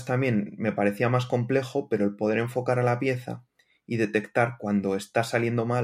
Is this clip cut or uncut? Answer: uncut